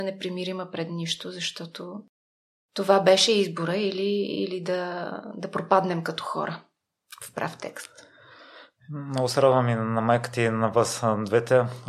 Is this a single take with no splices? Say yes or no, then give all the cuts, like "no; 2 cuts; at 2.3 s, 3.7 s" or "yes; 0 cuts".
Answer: yes; 0 cuts